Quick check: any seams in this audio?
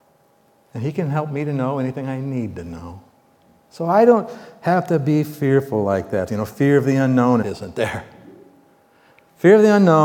yes; 2 cuts; at 6.3 s, 7.4 s

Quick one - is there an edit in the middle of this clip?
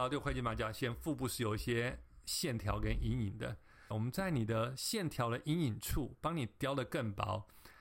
yes; 1 cut; at 3.9 s

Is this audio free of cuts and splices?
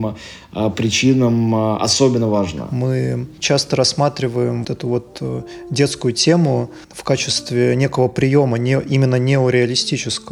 no; 2 cuts; at 4.6 s, 6.8 s

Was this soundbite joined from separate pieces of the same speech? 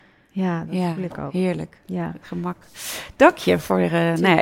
no; 0 cuts

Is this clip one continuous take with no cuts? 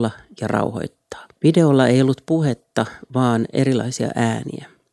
no; 1 cut; at 1.3 s

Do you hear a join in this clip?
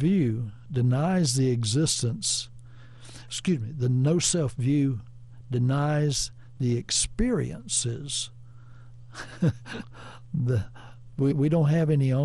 yes; 1 cut; at 11.3 s

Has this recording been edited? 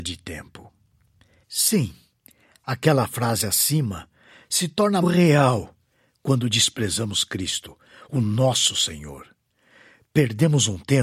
yes; 1 cut; at 5.0 s

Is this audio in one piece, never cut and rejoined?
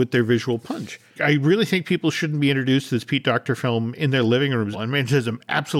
no; 2 cuts; at 1.2 s, 4.7 s

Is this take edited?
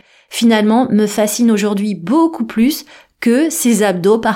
no; 0 cuts

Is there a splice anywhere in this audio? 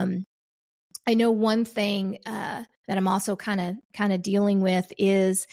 no; 0 cuts

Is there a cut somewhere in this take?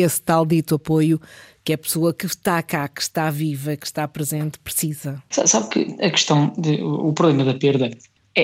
yes; 1 cut; at 5.3 s

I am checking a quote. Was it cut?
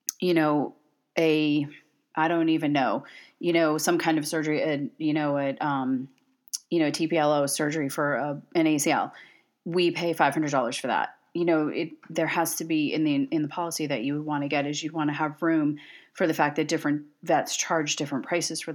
no; 0 cuts

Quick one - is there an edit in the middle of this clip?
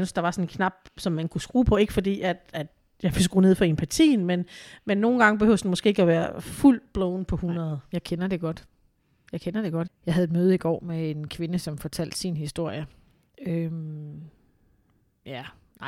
yes; 1 cut; at 9.9 s

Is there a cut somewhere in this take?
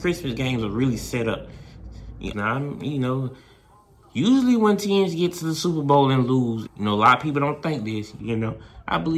yes; 3 cuts; at 2.3 s, 6.7 s, 8.2 s

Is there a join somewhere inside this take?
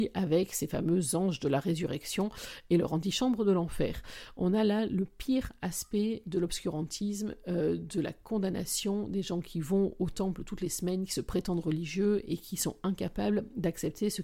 no; 0 cuts

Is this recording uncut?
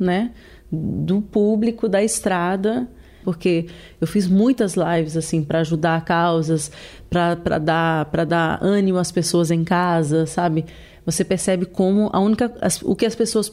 no; 1 cut; at 3.2 s

